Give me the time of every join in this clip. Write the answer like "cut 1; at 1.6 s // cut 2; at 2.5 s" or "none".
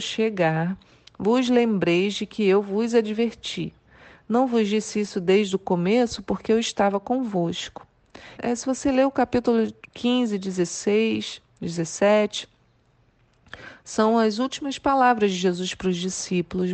cut 1; at 8.4 s